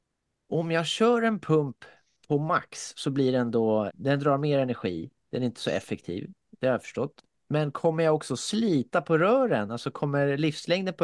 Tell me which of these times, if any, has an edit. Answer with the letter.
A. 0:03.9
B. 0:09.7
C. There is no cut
A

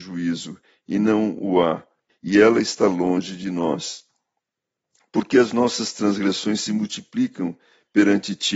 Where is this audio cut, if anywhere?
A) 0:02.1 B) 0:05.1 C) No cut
A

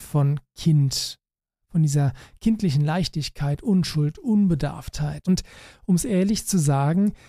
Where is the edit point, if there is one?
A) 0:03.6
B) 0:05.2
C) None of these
B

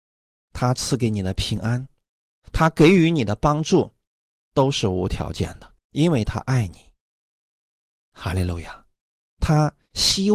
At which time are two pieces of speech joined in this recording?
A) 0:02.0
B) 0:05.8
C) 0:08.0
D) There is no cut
B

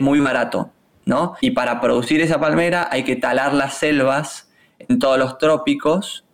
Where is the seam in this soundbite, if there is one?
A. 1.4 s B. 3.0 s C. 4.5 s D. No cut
A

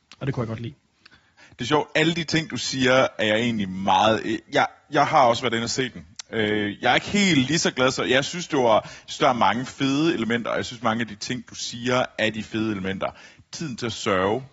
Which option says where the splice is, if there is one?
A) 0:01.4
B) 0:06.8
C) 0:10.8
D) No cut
A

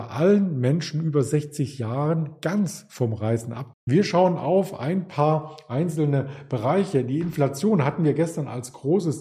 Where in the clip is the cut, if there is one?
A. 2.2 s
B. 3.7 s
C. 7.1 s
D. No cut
B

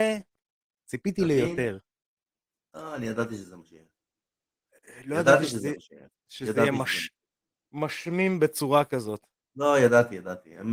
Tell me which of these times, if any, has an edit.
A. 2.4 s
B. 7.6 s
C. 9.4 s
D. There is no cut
D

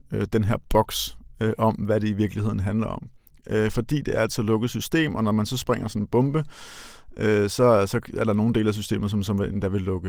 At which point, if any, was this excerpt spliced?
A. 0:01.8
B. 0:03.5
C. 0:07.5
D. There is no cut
D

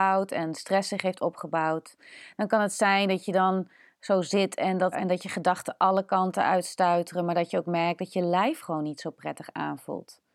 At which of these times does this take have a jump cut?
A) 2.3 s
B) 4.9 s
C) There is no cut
B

